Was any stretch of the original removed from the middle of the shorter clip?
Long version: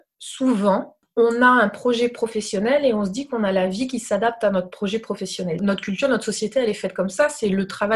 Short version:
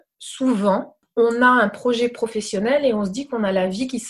no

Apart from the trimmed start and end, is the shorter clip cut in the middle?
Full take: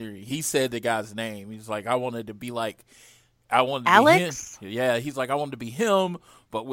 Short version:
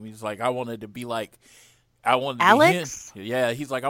no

